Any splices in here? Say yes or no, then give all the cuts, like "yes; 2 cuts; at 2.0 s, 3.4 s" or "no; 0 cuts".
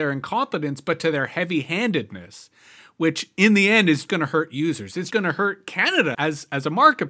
yes; 3 cuts; at 4.1 s, 5.1 s, 6.1 s